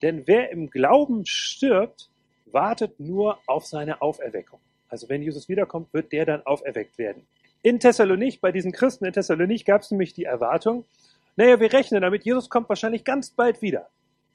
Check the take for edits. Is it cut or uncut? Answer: cut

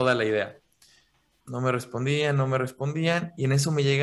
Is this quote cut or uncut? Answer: cut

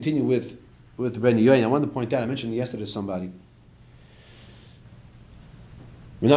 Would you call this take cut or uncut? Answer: uncut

